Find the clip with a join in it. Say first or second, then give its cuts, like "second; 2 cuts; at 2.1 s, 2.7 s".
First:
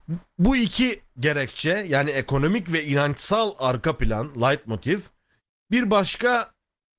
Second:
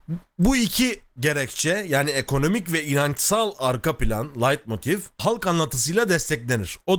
second; 1 cut; at 5.2 s